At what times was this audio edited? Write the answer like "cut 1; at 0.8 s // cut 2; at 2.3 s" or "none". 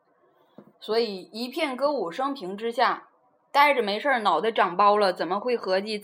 none